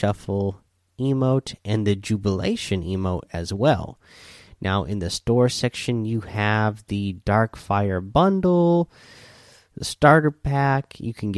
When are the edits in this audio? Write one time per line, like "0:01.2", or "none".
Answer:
none